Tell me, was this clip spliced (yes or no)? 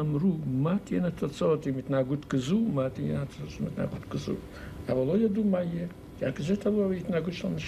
no